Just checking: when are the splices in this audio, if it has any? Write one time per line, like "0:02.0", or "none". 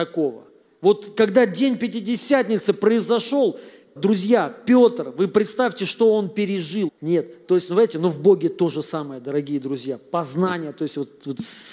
0:04.0
0:06.9